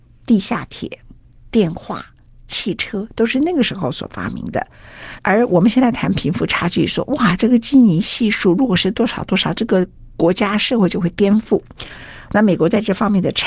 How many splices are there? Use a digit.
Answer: 2